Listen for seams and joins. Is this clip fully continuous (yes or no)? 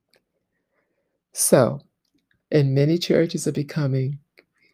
no